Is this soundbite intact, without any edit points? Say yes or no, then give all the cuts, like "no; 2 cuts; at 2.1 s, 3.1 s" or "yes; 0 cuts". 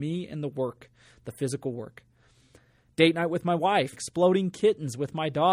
no; 1 cut; at 3.9 s